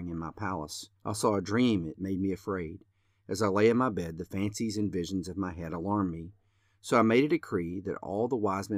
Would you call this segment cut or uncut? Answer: cut